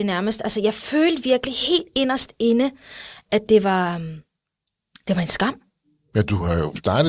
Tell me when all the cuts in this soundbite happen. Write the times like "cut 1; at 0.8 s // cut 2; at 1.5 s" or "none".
none